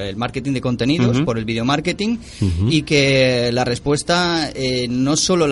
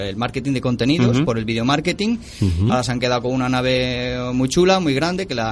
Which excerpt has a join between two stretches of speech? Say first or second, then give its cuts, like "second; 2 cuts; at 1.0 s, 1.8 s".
second; 1 cut; at 2.7 s